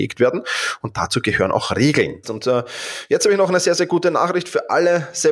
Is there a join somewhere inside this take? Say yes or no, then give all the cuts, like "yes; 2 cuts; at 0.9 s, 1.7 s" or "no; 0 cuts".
yes; 1 cut; at 2.2 s